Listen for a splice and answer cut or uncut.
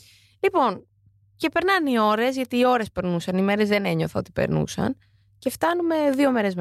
uncut